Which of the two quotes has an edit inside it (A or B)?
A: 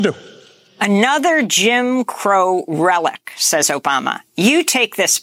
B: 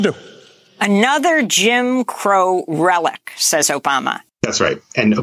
B